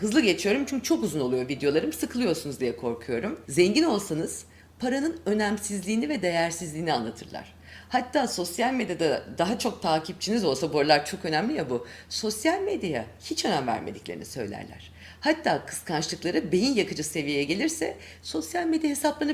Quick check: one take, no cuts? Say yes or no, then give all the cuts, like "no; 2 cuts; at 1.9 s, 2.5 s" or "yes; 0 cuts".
no; 1 cut; at 3.5 s